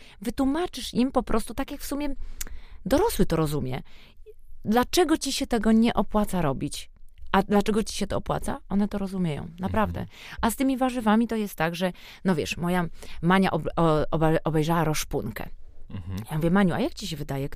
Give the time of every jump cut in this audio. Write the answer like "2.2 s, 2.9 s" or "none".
none

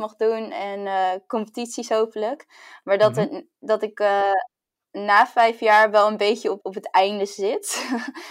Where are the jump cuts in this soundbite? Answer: 6.6 s

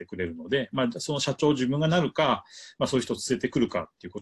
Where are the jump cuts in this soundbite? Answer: none

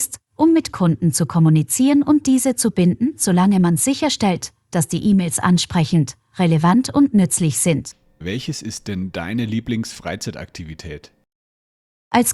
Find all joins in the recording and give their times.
8.2 s

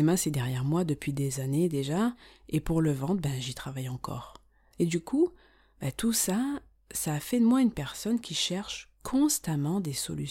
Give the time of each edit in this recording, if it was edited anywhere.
4.7 s

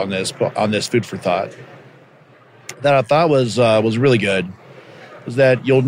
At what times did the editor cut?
none

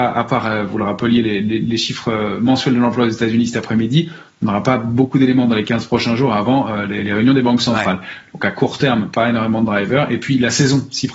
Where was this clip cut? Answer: none

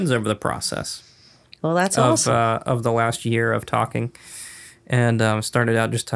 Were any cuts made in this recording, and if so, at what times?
none

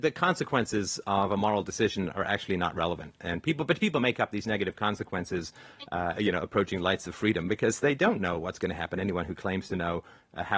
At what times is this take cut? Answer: 6.1 s

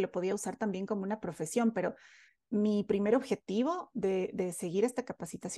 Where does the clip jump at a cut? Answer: none

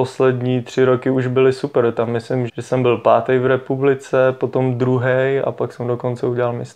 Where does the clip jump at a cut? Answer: 2.5 s

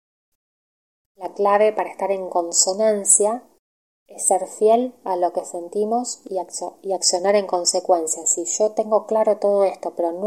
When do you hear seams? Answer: none

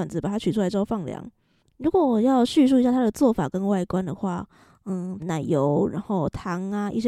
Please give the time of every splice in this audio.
1.6 s, 5.2 s

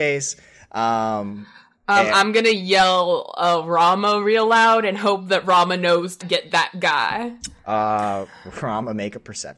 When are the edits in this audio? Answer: 6.2 s

